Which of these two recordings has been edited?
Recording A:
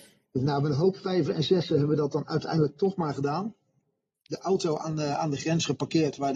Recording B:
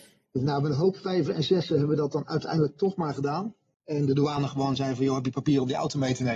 B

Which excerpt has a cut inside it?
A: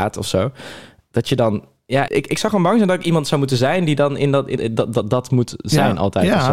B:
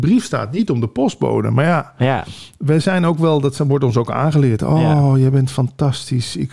A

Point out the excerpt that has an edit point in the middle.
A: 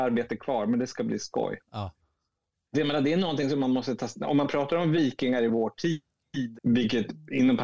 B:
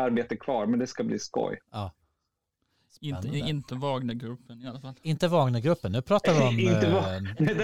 A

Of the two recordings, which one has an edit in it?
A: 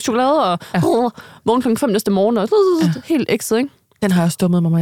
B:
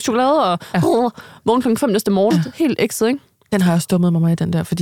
B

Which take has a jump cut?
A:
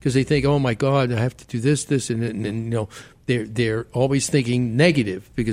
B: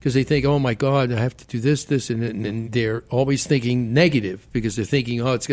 B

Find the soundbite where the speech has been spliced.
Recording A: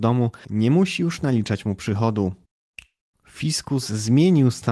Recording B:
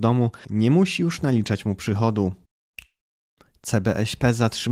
A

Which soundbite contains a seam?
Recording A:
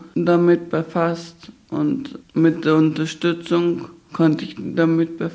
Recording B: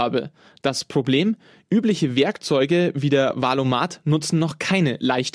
A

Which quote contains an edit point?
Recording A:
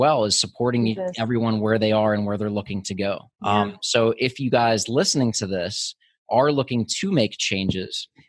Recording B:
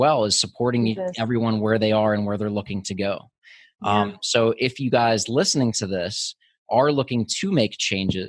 A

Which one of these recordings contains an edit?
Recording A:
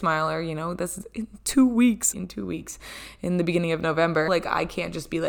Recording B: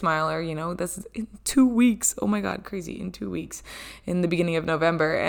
A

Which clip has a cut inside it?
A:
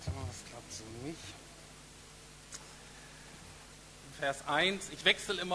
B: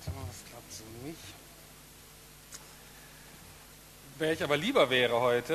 A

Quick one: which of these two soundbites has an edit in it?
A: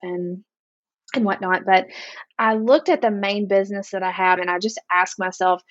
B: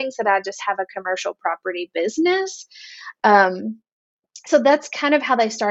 A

